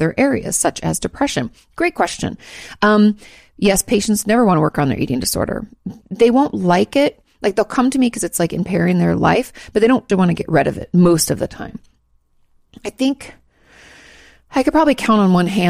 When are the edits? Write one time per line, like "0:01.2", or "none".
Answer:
0:10.1